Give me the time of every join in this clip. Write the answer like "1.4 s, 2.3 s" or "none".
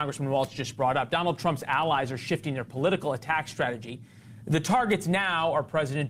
none